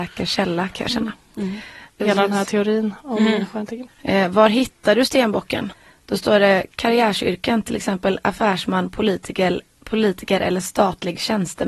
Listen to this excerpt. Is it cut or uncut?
cut